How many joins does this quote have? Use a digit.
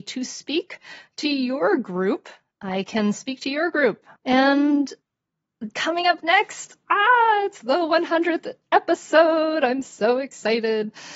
1